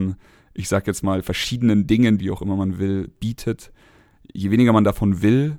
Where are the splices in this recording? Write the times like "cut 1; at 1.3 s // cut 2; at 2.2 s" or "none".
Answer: cut 1; at 2.2 s

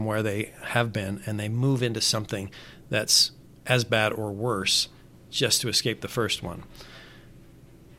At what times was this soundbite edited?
none

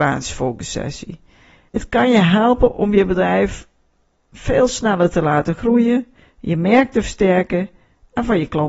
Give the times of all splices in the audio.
cut 1; at 1.7 s

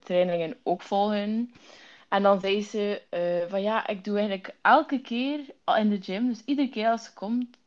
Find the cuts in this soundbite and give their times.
none

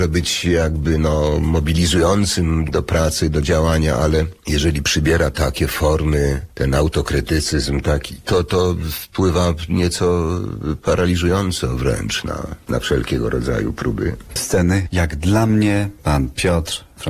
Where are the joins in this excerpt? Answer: cut 1; at 14.4 s

